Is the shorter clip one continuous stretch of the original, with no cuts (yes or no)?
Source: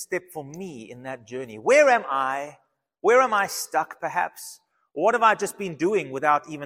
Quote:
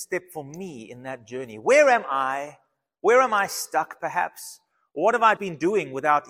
no